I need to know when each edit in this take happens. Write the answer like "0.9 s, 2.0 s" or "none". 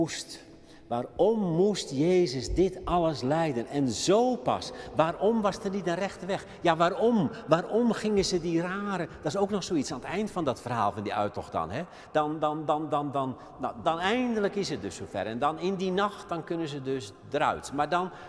13.8 s